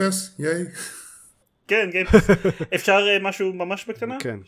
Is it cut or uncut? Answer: uncut